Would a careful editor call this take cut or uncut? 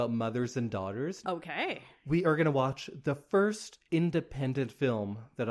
cut